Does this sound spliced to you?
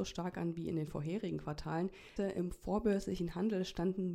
yes; 1 cut; at 2.2 s

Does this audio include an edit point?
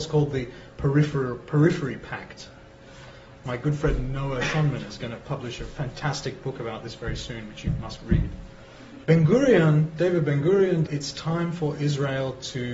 yes; 2 cuts; at 9.0 s, 10.9 s

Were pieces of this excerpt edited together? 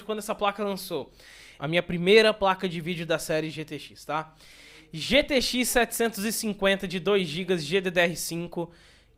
yes; 1 cut; at 1.6 s

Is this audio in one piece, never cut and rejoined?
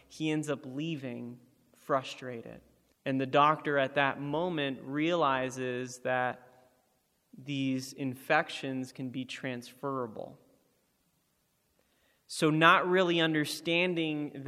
no; 1 cut; at 2.9 s

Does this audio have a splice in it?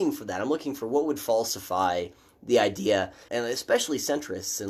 yes; 1 cut; at 3.3 s

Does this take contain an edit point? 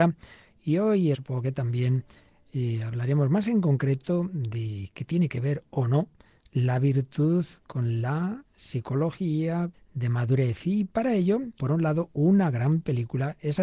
yes; 3 cuts; at 1.1 s, 9.7 s, 11.6 s

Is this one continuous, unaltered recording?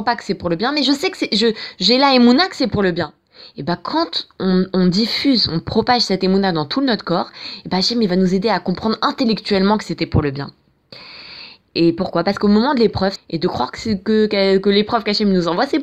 no; 1 cut; at 13.2 s

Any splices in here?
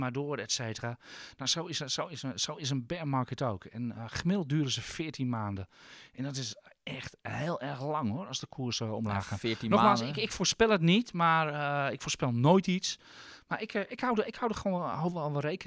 no; 0 cuts

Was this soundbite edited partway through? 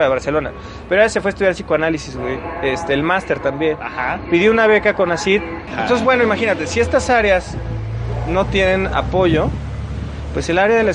yes; 1 cut; at 5.7 s

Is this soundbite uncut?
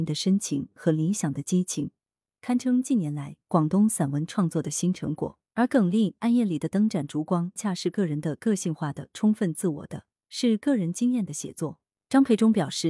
no; 2 cuts; at 5.5 s, 7.6 s

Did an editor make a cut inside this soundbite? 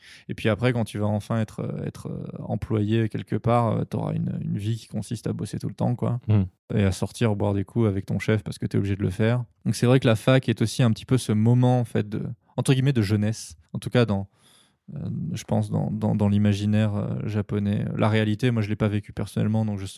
yes; 1 cut; at 13.7 s

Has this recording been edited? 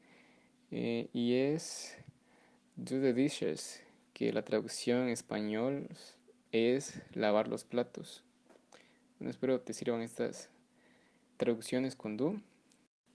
yes; 1 cut; at 11.4 s

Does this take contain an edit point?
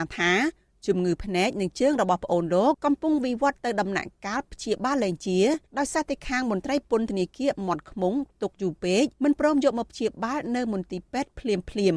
yes; 3 cuts; at 2.7 s, 5.7 s, 9.1 s

